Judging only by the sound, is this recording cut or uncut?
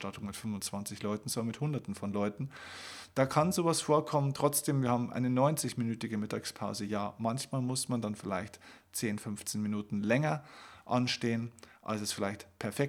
cut